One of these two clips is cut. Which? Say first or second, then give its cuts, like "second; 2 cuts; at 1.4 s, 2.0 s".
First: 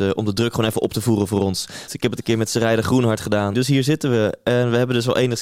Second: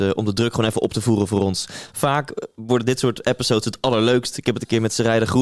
first; 2 cuts; at 1.9 s, 3.5 s